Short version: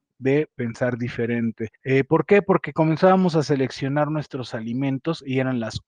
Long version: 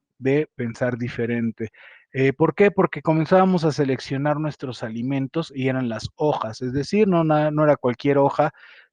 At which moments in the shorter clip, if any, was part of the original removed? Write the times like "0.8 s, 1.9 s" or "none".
1.8 s